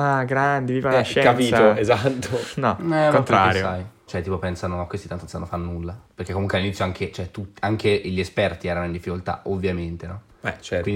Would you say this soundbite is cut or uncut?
cut